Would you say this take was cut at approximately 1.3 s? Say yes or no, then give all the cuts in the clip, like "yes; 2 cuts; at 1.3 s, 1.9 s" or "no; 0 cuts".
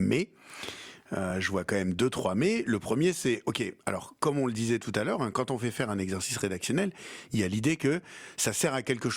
no; 0 cuts